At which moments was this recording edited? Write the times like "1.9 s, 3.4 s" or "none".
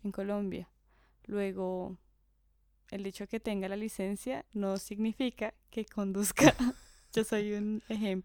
none